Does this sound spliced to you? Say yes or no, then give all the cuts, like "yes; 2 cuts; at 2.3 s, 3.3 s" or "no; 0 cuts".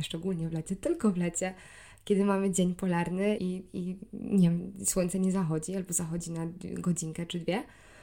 yes; 1 cut; at 3.4 s